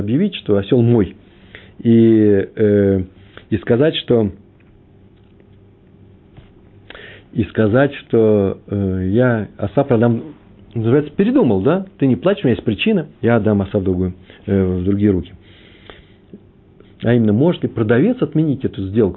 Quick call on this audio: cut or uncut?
cut